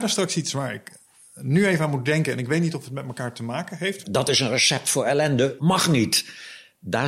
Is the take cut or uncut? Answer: cut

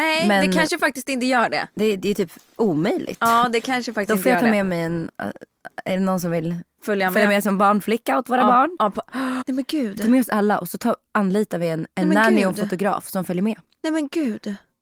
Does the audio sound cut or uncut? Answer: cut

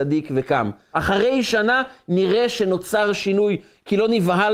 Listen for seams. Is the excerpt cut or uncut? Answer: cut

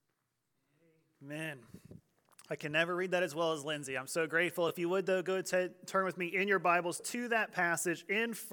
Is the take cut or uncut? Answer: uncut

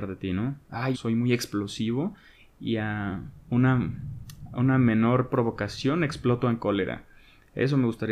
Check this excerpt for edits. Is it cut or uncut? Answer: cut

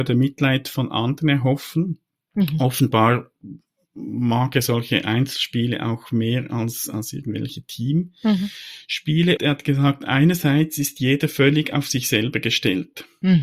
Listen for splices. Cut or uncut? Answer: cut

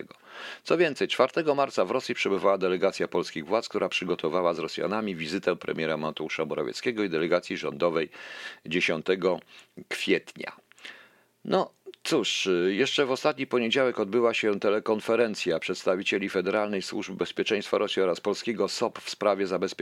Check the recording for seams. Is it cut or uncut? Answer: uncut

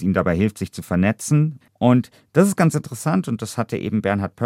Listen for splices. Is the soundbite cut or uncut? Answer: cut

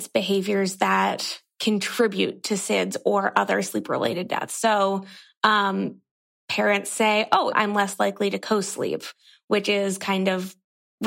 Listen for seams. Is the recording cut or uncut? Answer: cut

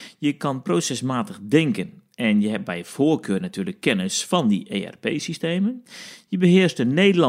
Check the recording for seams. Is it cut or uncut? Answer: uncut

